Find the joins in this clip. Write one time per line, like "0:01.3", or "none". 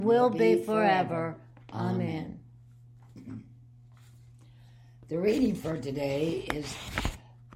none

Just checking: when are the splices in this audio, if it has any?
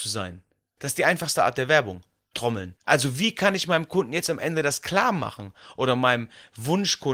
0:02.8

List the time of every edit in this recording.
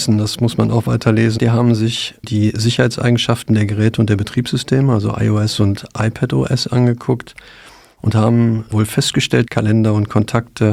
0:01.4
0:09.5

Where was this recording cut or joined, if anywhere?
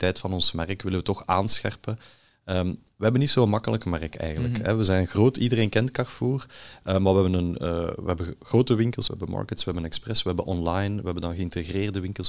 0:09.1

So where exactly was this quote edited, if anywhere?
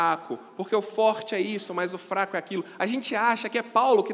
none

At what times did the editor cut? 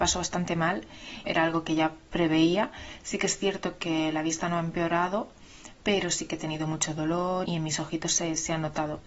0:01.2
0:07.5

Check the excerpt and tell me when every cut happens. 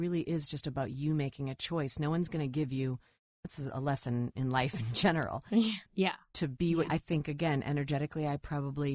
0:05.8
0:06.9

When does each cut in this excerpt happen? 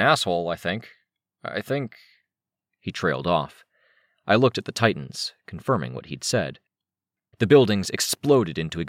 0:07.3

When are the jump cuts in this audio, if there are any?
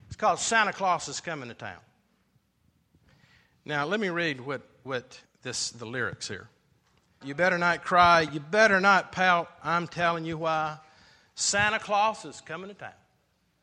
0:05.2
0:07.2

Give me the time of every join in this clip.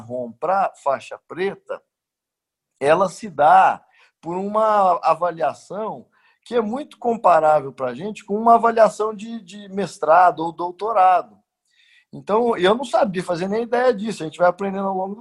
none

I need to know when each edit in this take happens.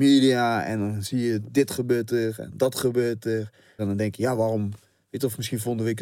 0:03.8

